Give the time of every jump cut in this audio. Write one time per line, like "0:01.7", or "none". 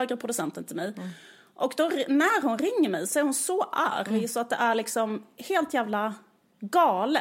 none